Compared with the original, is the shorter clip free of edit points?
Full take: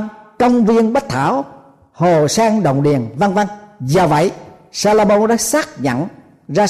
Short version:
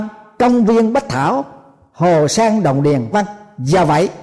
no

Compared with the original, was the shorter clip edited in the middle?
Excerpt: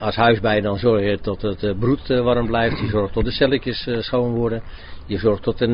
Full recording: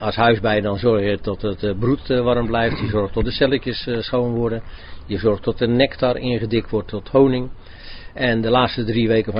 no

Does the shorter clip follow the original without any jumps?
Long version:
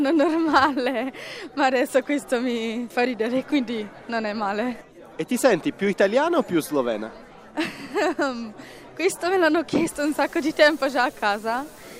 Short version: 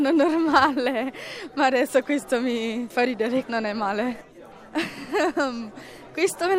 no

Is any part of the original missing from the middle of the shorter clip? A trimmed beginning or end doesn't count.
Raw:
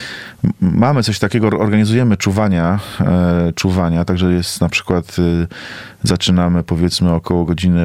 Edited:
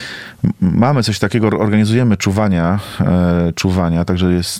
no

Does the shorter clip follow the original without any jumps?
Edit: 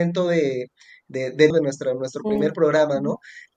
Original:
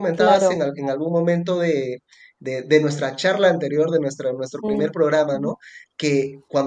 no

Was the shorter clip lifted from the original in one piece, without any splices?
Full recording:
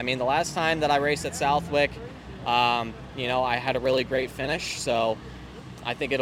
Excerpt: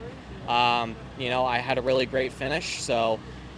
yes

